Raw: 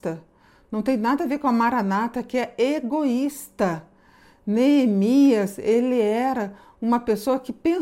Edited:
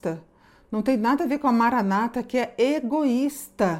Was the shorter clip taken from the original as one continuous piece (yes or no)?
yes